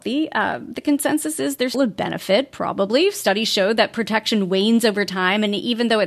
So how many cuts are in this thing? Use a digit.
1